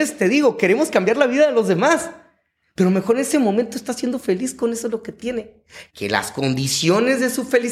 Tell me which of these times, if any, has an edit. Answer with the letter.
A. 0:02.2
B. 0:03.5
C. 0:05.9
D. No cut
C